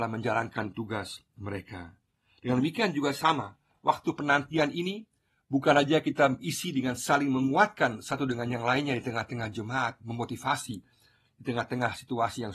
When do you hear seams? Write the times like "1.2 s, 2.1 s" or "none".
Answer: none